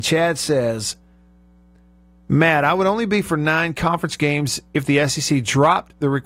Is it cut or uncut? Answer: uncut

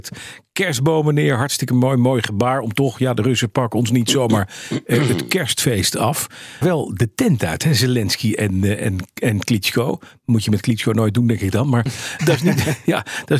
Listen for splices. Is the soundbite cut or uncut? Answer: cut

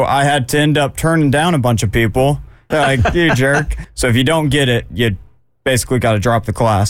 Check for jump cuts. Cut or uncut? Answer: cut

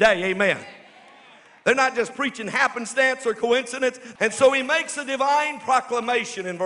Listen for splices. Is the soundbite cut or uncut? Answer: cut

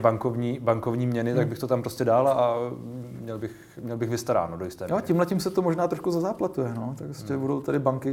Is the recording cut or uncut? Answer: uncut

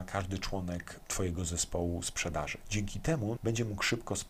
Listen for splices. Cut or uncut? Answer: cut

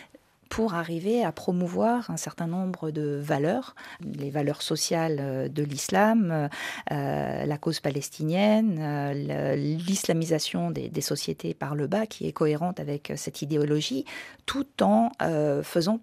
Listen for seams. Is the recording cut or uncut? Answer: uncut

